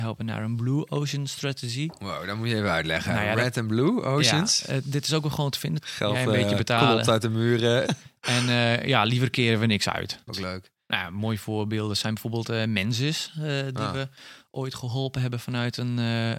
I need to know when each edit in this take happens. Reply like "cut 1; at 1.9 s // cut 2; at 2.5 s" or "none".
cut 1; at 5.8 s // cut 2; at 7.8 s // cut 3; at 10.3 s